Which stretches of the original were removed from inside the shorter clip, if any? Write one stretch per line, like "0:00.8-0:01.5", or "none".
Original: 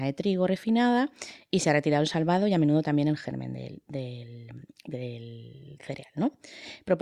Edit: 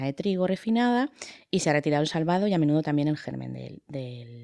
none